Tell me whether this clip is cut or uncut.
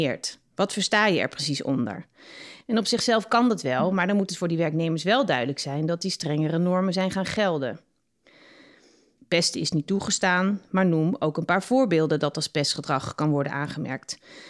cut